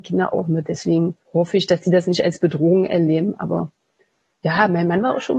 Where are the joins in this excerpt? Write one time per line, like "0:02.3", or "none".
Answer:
0:01.2